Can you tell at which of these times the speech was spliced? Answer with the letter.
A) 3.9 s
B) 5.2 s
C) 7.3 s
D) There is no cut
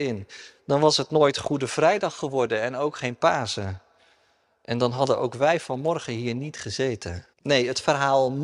C